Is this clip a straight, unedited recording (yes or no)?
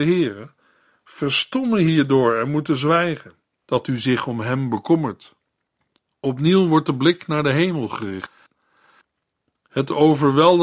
no